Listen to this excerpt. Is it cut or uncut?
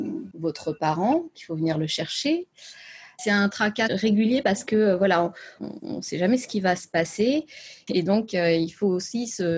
cut